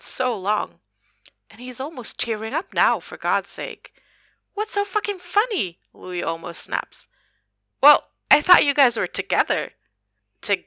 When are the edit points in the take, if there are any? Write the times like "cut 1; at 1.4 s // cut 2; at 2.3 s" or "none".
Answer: none